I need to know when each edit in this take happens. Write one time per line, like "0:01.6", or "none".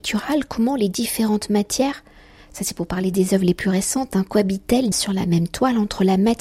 0:04.9